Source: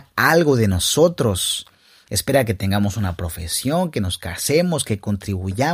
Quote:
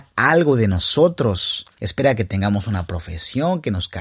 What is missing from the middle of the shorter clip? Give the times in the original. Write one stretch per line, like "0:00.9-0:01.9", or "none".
0:01.7-0:02.0